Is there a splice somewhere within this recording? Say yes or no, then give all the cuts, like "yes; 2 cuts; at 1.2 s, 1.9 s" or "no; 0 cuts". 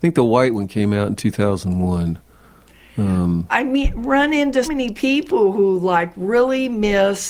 yes; 2 cuts; at 3.5 s, 4.6 s